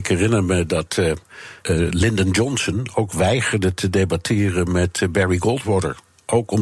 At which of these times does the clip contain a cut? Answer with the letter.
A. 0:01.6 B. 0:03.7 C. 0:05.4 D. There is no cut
A